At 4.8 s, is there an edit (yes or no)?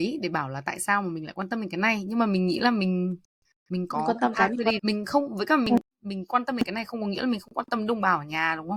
yes